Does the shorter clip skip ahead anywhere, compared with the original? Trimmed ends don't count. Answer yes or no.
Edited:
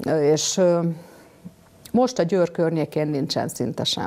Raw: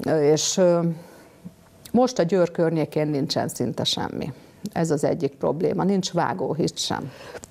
no